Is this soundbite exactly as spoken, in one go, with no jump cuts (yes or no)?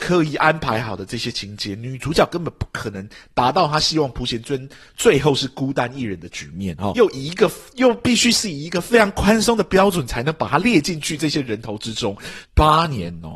no